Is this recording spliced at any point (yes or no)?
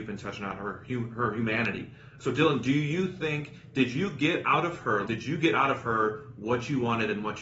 yes